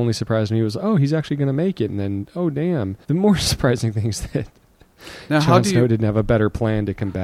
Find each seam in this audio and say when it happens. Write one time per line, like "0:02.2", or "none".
0:03.0